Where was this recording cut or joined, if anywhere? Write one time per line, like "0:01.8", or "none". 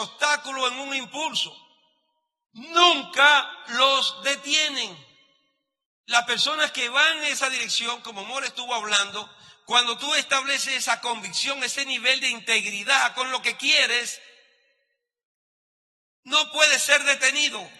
none